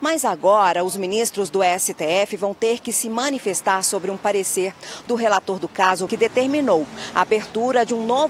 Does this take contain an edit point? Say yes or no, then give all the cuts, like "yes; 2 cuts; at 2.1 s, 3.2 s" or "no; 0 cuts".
yes; 1 cut; at 6.1 s